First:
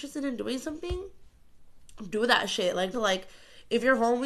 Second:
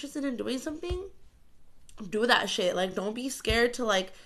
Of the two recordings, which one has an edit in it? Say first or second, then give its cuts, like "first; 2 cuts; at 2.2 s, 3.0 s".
first; 1 cut; at 2.9 s